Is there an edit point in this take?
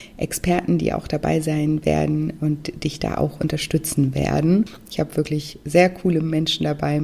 no; 0 cuts

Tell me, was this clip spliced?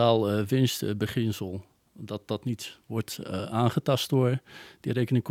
no; 0 cuts

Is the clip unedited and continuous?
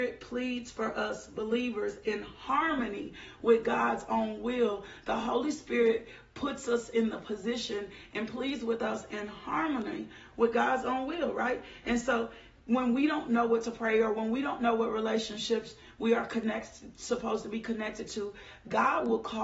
yes; 0 cuts

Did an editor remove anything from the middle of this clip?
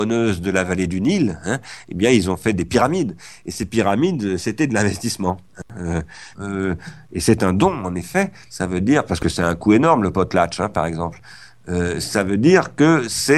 yes; 2 cuts; at 6.3 s, 8.5 s

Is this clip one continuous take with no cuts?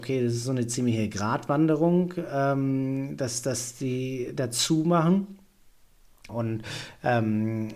no; 1 cut; at 6.3 s

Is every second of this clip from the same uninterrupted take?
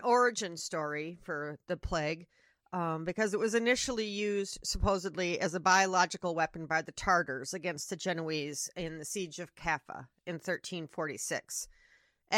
yes; 0 cuts

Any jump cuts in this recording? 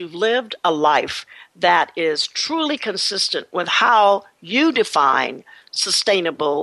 no; 0 cuts

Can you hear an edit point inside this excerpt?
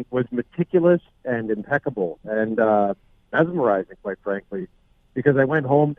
no; 0 cuts

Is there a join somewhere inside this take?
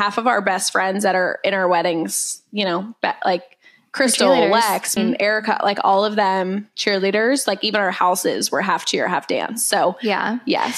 yes; 1 cut; at 5.0 s

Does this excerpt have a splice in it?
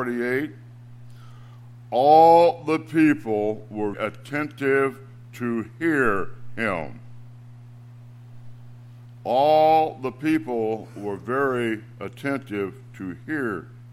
yes; 1 cut; at 3.9 s

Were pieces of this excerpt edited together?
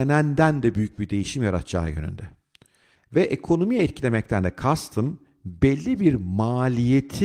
yes; 1 cut; at 2.9 s

